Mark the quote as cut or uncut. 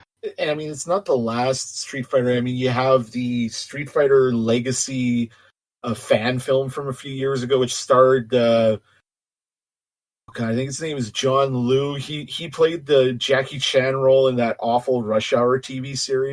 uncut